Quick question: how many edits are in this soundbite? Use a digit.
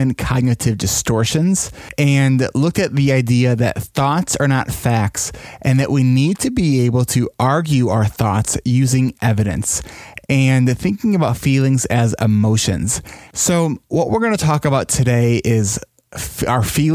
2